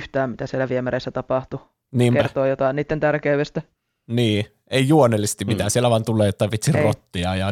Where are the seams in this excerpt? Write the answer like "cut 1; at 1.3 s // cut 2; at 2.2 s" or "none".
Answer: none